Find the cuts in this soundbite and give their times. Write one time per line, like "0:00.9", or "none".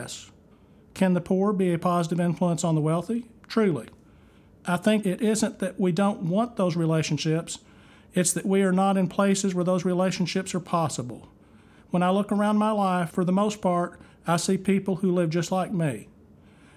0:03.4